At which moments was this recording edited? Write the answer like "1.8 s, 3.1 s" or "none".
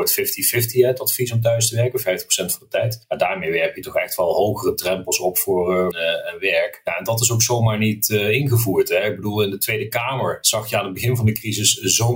5.9 s

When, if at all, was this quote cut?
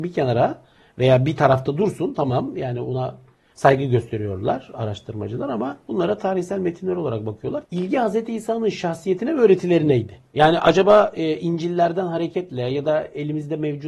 7.6 s

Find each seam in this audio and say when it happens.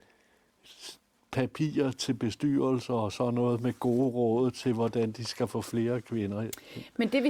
none

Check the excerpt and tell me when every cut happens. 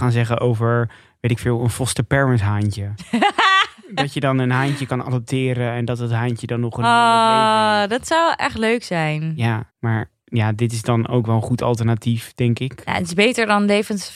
9.7 s

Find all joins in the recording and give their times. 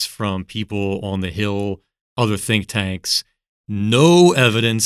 3.6 s

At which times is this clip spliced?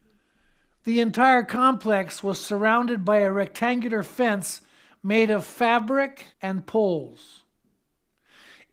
6.3 s

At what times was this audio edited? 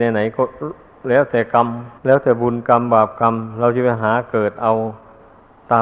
2.0 s

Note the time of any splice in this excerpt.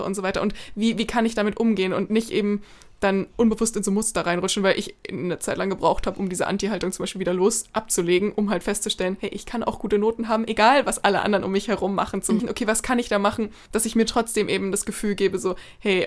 12.4 s

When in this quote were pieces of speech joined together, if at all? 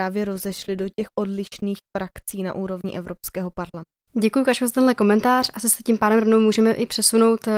4.1 s

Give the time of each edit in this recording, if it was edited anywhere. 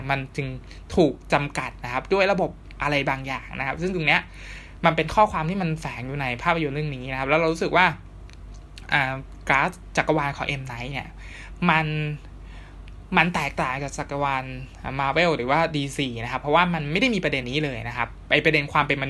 17.4 s

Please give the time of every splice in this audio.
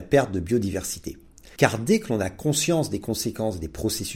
1.6 s

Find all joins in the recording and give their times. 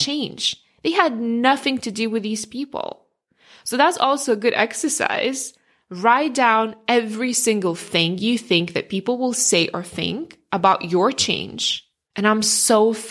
12.1 s

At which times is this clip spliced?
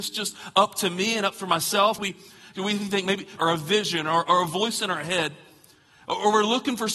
2.0 s, 3.4 s

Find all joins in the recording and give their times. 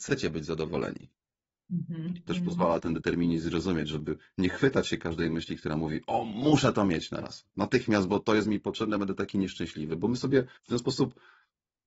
2.3 s, 10.6 s

